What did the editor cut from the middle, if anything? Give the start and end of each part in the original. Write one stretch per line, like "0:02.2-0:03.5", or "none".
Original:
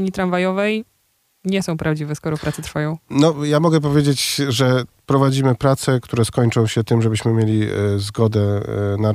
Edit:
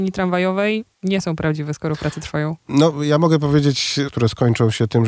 0:00.9-0:01.3
0:04.5-0:06.0